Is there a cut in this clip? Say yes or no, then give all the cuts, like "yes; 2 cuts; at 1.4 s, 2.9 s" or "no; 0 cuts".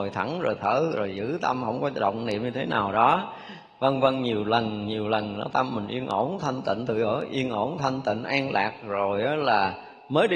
no; 0 cuts